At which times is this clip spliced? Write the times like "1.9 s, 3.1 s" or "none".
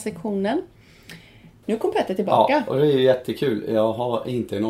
1.6 s